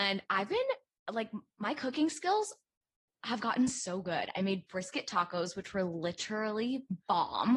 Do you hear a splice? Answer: no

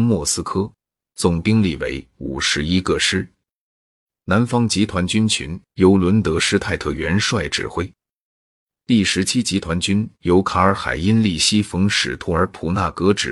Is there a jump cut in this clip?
no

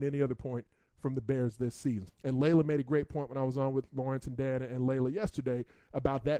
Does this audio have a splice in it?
yes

